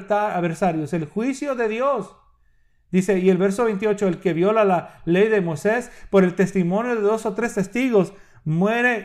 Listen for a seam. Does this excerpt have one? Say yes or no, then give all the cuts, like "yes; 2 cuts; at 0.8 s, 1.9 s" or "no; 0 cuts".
no; 0 cuts